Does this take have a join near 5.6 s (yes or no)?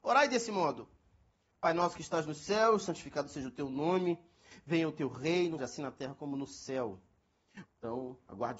yes